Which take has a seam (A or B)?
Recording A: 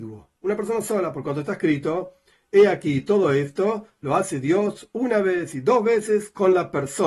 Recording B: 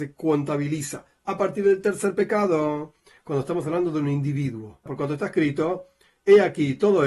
B